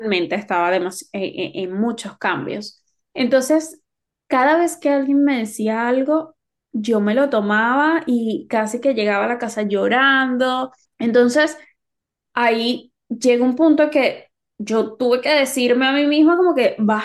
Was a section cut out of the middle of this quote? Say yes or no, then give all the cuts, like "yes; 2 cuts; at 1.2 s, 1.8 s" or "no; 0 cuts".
yes; 1 cut; at 10.8 s